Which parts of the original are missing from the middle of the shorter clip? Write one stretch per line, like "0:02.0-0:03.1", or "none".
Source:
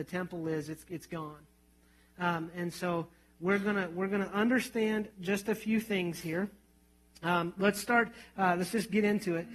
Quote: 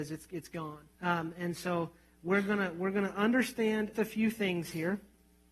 0:01.5-0:02.1
0:05.1-0:05.4